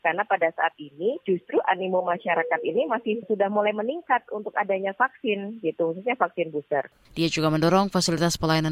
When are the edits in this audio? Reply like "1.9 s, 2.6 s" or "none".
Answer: 7.1 s